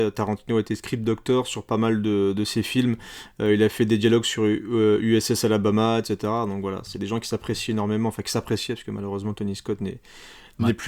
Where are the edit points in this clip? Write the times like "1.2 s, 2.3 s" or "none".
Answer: none

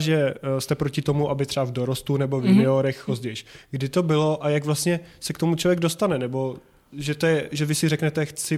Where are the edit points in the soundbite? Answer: 3.1 s

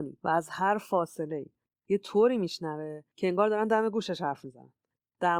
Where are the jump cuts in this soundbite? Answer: none

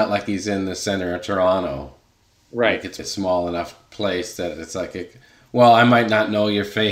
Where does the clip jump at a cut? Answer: 3.0 s

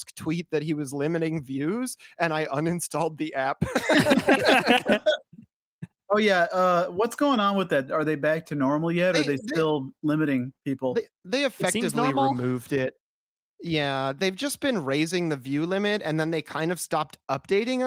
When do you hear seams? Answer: 7.9 s

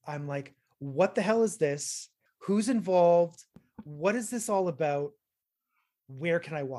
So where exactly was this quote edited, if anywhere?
2.3 s

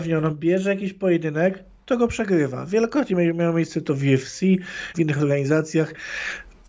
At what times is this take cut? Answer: 4.9 s

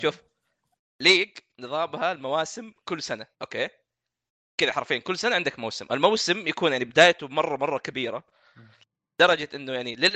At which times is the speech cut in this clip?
3.3 s

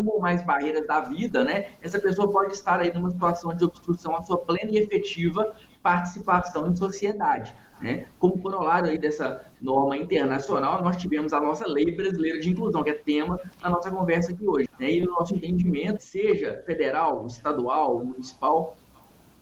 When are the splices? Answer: 14.7 s, 16.0 s

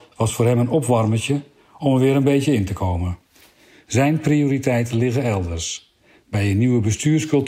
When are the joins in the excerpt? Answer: none

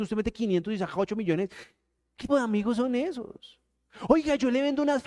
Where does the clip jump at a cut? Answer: 2.3 s

